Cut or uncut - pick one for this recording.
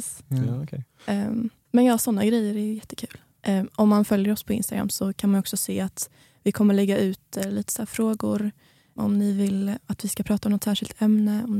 cut